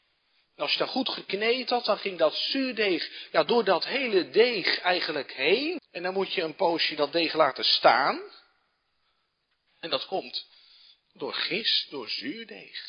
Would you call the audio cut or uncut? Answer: cut